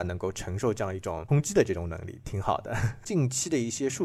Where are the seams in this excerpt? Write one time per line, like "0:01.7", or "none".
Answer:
0:03.0